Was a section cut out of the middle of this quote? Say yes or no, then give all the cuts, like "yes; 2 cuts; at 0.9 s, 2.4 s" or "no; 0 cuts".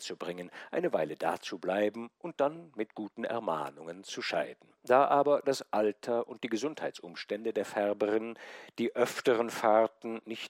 yes; 1 cut; at 4.8 s